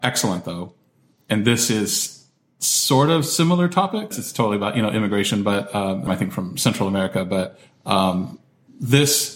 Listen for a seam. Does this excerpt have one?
yes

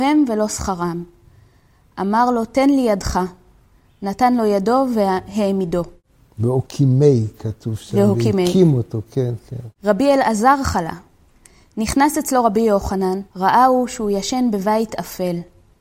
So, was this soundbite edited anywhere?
yes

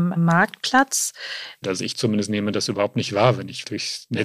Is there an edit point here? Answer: yes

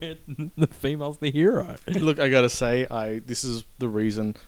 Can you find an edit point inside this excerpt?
yes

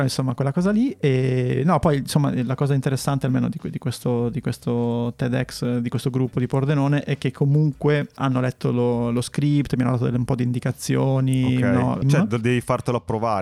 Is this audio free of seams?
no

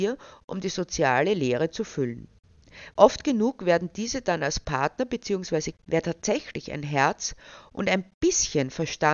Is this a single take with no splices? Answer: no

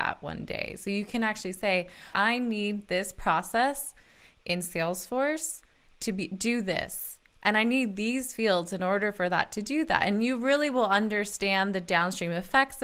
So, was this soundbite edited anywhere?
yes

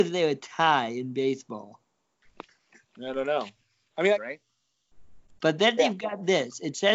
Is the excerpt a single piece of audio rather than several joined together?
no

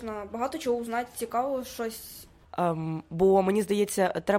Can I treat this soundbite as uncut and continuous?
no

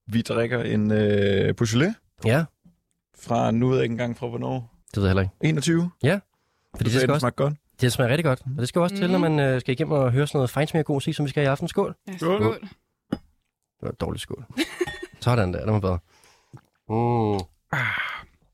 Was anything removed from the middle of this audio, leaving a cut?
yes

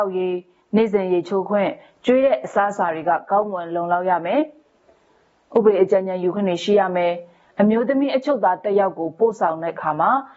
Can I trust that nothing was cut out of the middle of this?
yes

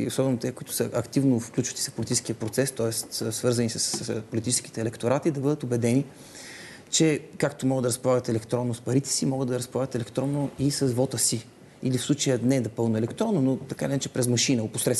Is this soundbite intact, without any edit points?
yes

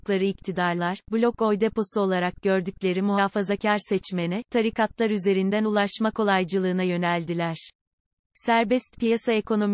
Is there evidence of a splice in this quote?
no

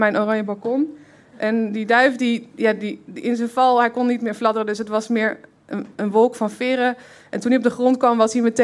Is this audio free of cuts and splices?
yes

